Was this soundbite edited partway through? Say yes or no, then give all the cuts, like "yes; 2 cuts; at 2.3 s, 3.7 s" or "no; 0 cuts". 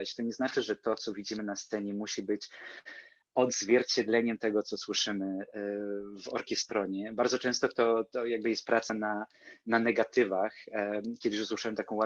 no; 0 cuts